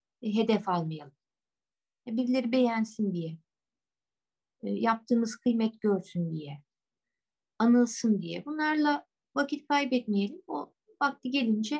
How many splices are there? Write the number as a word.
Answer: zero